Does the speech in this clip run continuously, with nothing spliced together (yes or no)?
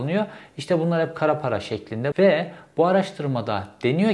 no